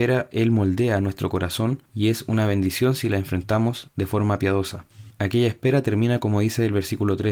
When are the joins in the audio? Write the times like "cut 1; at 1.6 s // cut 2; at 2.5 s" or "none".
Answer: none